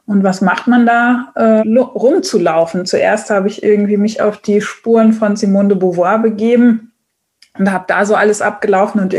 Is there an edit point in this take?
yes; 1 cut; at 1.6 s

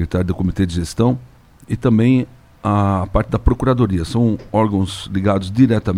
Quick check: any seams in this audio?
no; 0 cuts

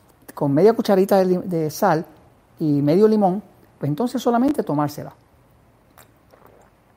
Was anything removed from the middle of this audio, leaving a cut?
no; 0 cuts

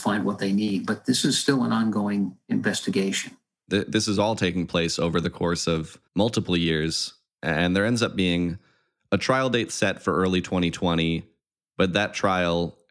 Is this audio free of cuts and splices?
no; 1 cut; at 6.1 s

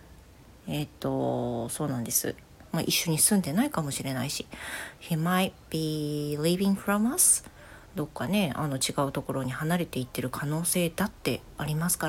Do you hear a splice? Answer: yes; 2 cuts; at 2.6 s, 7.9 s

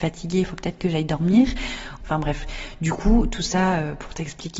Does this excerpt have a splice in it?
yes; 1 cut; at 2.0 s

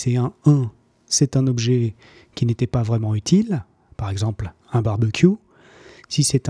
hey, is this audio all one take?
yes; 0 cuts

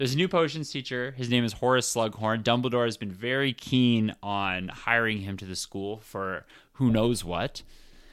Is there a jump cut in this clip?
no; 0 cuts

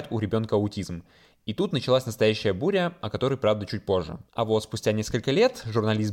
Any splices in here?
no; 0 cuts

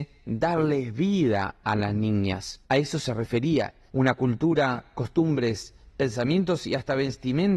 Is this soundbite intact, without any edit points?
no; 2 cuts; at 2.6 s, 3.9 s

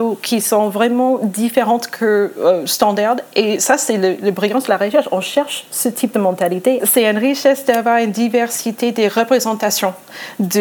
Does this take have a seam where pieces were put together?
yes; 1 cut; at 6.8 s

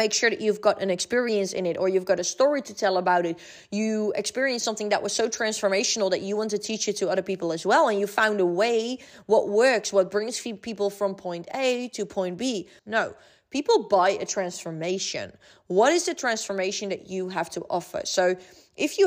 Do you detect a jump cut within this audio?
yes; 1 cut; at 12.8 s

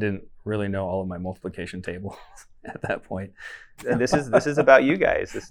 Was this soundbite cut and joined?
yes; 1 cut; at 3.8 s

